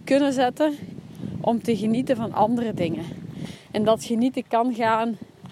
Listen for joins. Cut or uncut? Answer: uncut